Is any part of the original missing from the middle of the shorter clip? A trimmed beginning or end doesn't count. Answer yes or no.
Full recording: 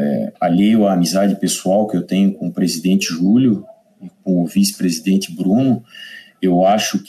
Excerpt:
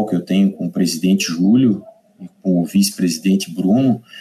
no